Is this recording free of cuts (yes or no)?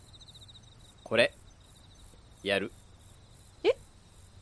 yes